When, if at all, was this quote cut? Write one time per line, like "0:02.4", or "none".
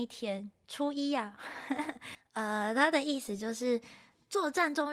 0:02.1